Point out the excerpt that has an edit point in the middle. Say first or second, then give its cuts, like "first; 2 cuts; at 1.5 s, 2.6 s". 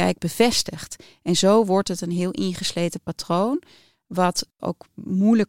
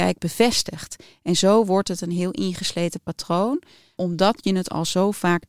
second; 1 cut; at 4.0 s